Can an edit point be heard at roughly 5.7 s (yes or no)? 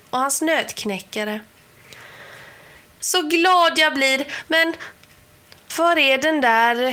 yes